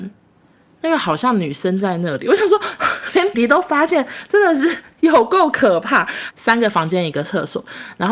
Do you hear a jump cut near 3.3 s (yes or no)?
yes